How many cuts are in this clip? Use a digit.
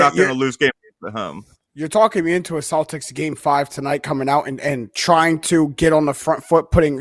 1